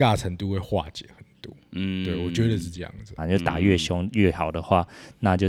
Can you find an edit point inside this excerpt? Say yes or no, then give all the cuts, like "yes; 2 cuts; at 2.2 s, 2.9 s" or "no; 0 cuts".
yes; 1 cut; at 3.2 s